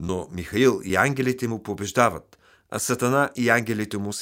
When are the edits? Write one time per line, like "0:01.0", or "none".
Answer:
none